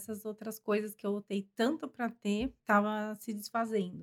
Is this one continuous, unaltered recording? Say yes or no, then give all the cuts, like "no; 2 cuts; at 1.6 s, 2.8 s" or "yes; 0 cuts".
no; 1 cut; at 2.6 s